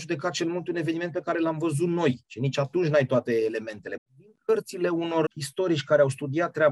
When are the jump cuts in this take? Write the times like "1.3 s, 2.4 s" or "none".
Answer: 4.0 s, 5.3 s